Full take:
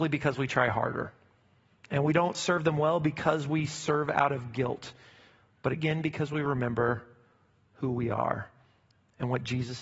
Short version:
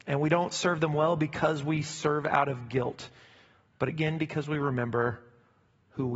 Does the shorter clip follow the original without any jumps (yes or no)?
yes